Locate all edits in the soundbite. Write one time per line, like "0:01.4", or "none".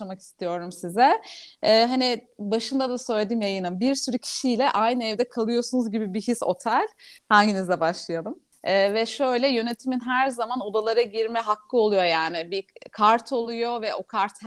0:07.2
0:08.5